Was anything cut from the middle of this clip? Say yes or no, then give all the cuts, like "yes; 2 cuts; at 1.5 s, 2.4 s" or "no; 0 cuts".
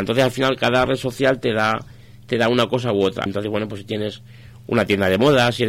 yes; 1 cut; at 3.3 s